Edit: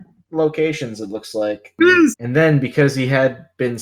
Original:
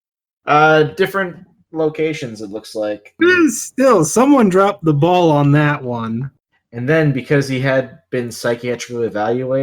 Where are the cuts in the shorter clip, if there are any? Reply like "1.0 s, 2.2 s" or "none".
2.1 s